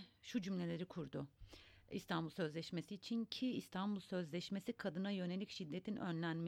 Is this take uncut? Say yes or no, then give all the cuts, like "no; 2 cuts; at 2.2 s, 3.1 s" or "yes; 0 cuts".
yes; 0 cuts